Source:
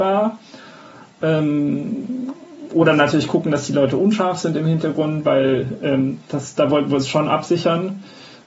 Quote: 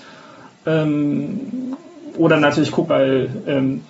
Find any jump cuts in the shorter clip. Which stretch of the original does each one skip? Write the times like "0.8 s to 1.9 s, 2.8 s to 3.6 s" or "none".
3.4 s to 5.2 s